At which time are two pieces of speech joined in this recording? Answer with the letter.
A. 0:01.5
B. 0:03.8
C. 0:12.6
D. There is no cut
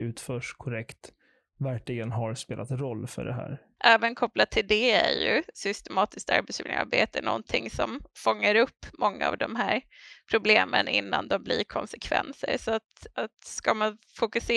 B